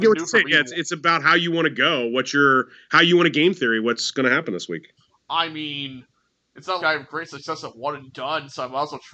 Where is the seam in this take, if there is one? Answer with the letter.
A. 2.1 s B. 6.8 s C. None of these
B